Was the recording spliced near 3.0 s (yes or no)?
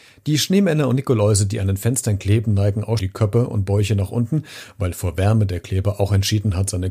yes